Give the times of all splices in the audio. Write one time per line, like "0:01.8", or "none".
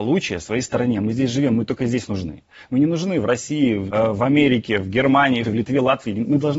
0:03.9
0:05.4